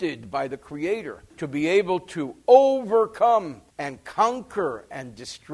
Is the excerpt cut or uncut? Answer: cut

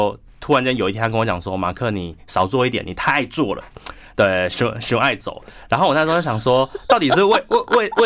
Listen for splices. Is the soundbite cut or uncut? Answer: uncut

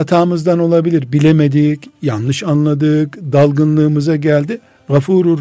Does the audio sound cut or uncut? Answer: uncut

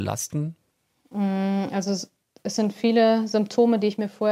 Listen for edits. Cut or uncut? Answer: uncut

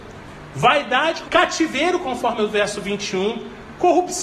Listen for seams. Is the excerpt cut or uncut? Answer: cut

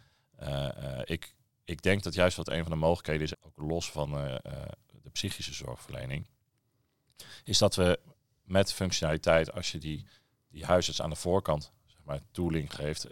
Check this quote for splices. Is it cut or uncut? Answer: cut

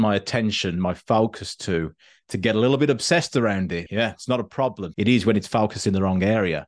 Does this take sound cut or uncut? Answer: cut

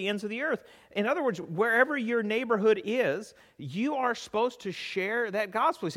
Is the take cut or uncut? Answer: uncut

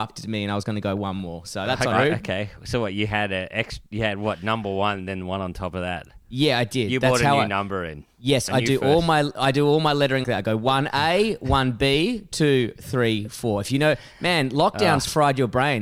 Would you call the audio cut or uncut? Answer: cut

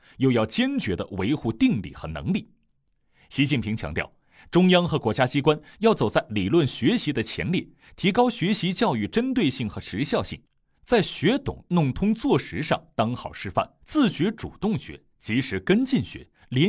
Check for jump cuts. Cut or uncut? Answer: cut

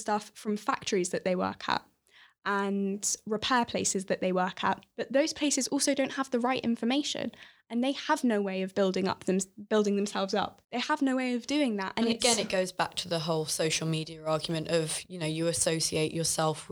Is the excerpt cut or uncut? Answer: cut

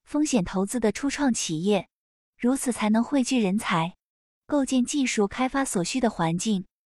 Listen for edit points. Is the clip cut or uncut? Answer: uncut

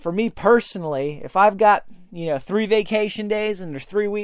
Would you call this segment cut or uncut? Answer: uncut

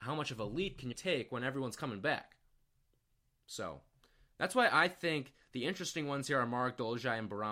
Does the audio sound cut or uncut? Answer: cut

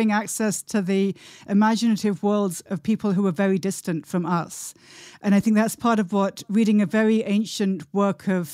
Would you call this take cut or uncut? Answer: uncut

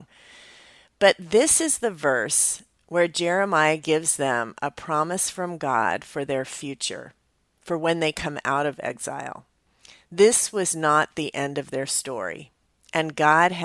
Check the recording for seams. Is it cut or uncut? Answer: uncut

